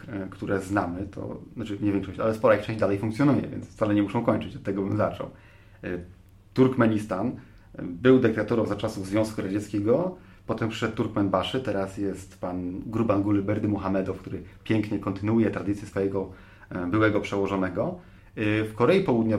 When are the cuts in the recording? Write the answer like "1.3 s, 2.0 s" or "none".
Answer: 18.2 s